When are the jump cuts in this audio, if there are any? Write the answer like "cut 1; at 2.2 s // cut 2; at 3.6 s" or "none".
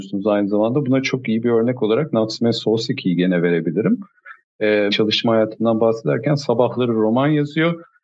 cut 1; at 4.9 s

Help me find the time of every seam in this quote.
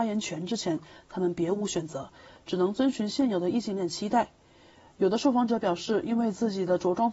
none

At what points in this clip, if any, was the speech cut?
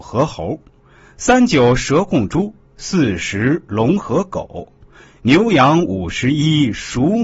none

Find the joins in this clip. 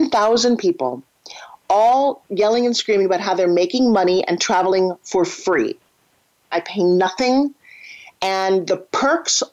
cut 1; at 6.5 s

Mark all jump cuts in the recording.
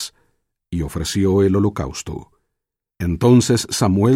cut 1; at 2.9 s

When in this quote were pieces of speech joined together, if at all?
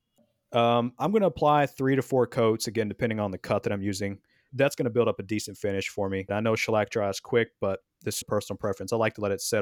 cut 1; at 4.5 s // cut 2; at 6.3 s // cut 3; at 8.2 s

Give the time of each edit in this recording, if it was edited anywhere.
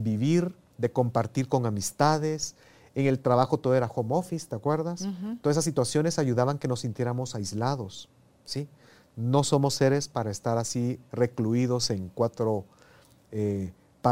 none

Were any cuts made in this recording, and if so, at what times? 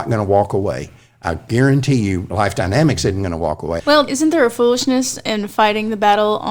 cut 1; at 3.8 s

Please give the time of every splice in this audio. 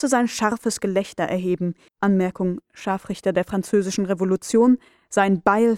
cut 1; at 1.9 s

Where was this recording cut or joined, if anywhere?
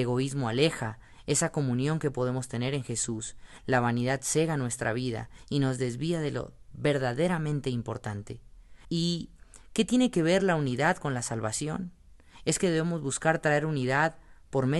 cut 1; at 8.8 s

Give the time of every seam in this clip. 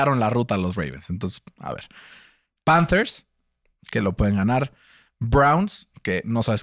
none

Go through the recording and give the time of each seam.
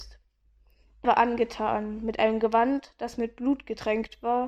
cut 1; at 1.0 s

